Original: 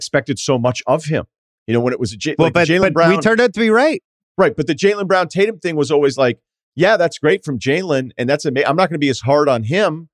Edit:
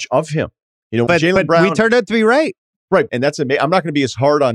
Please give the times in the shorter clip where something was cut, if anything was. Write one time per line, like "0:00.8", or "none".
0:01.1
0:03.1